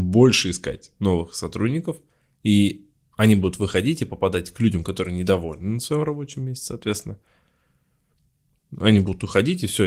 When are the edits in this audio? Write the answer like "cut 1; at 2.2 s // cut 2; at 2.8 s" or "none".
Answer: none